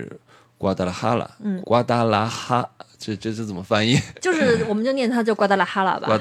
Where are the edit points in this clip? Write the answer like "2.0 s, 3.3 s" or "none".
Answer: 1.6 s